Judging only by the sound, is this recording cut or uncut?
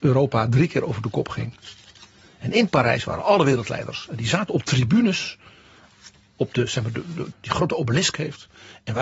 cut